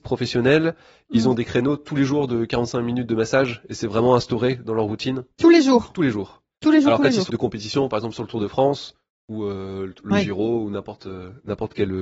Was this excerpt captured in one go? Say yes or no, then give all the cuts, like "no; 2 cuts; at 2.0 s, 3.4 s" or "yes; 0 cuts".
no; 1 cut; at 7.3 s